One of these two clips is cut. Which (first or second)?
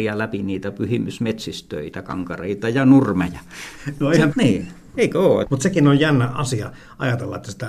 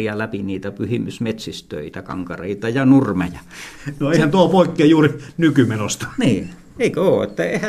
first